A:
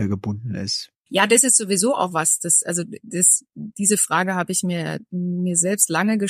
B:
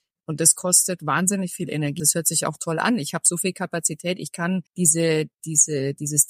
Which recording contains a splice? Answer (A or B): B